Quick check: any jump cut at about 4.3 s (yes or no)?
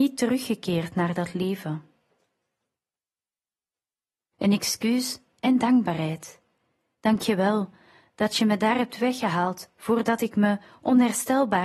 yes